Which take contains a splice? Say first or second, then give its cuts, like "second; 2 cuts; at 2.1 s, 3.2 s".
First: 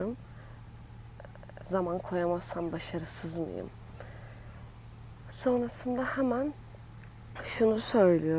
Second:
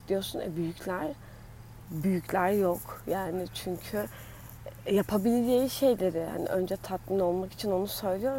first; 2 cuts; at 1.6 s, 5.2 s